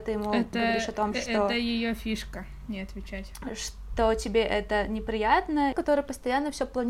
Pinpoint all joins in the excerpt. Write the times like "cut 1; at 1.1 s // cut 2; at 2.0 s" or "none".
cut 1; at 5.7 s